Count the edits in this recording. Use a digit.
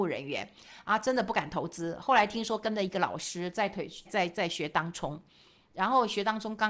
1